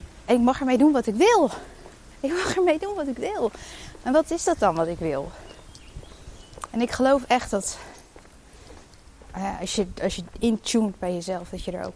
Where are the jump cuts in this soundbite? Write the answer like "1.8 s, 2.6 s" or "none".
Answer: none